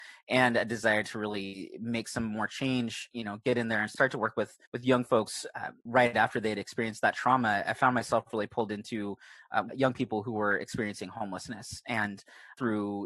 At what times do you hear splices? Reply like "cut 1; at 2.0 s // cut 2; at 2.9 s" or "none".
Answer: cut 1; at 4.6 s // cut 2; at 7.7 s // cut 3; at 9.7 s